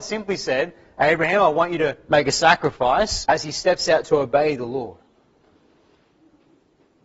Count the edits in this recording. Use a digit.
1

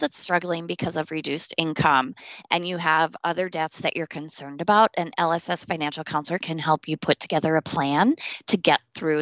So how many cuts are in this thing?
0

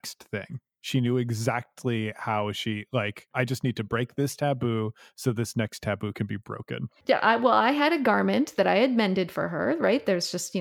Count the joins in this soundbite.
0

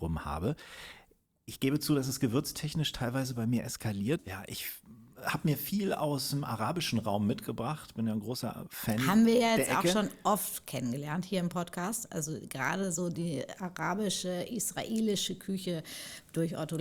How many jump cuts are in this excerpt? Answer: 1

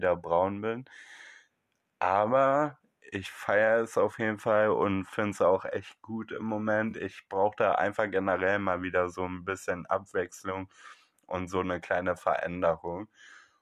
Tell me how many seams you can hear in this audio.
0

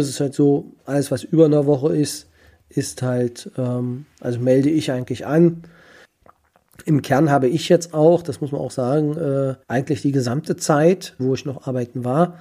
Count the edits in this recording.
2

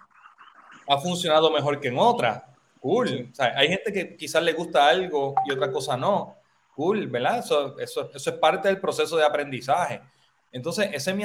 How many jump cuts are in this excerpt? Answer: 0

